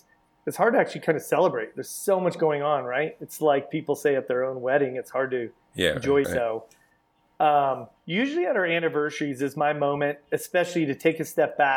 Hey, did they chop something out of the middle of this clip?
yes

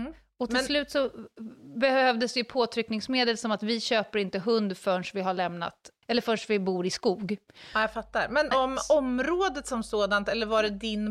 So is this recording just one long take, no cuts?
no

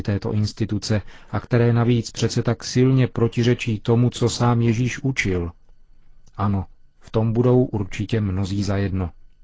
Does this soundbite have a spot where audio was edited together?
no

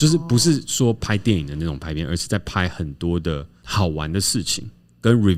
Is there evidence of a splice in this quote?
no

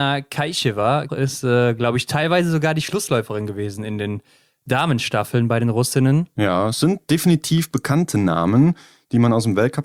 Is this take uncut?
no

